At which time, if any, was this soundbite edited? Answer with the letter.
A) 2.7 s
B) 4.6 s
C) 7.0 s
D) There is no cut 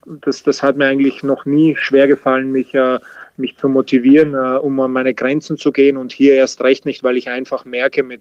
D